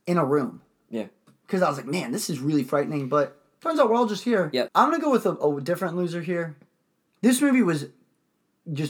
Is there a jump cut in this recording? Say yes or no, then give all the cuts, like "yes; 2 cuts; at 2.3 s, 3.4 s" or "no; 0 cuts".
yes; 2 cuts; at 4.7 s, 7.2 s